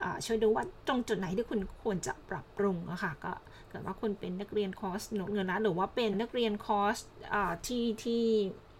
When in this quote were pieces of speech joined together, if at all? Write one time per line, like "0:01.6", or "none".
0:06.1